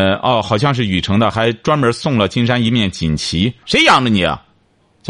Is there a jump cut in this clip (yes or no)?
yes